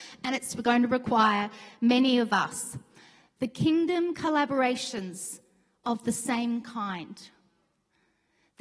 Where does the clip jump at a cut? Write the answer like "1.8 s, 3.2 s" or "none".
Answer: none